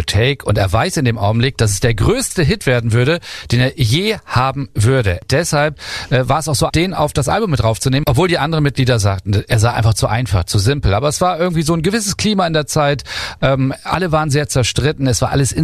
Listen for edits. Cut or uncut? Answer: cut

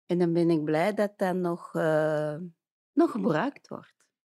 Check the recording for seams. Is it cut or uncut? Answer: uncut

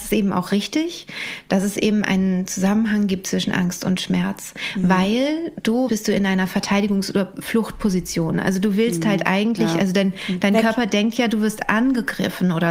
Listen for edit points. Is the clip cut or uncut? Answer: cut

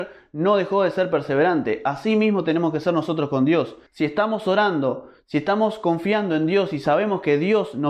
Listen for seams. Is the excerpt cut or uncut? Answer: cut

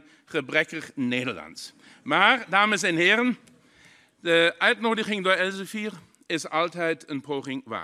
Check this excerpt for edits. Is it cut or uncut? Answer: uncut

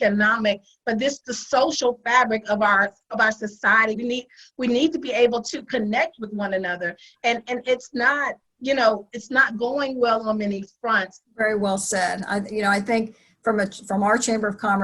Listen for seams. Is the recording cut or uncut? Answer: cut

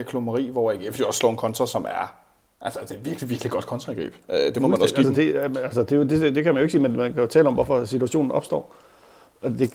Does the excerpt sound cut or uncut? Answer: uncut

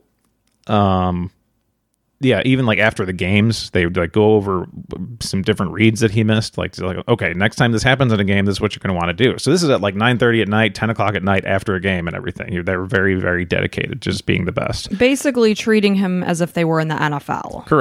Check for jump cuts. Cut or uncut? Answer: uncut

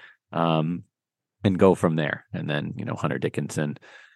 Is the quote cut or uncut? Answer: uncut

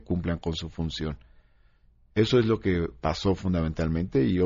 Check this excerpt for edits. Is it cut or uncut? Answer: uncut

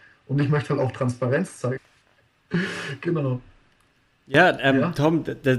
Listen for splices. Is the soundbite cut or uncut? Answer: cut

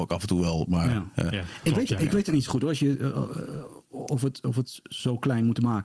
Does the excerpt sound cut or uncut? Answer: uncut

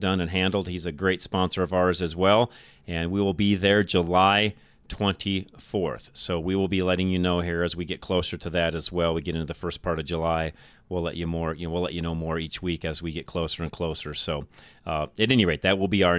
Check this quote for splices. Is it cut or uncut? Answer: uncut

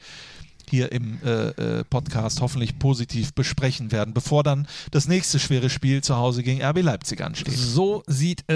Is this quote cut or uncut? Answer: uncut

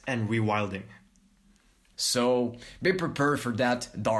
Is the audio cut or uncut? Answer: cut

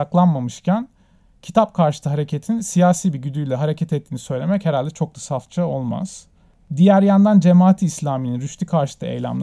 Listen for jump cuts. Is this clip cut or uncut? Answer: uncut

